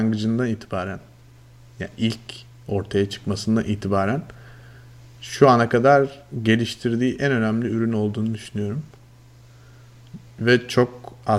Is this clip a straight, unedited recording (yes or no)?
yes